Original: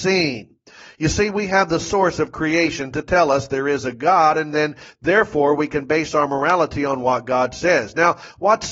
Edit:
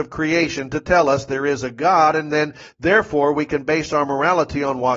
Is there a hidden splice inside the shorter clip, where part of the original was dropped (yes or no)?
no